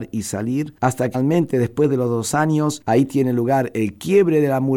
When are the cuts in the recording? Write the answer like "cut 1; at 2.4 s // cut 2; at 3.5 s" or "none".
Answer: cut 1; at 1.1 s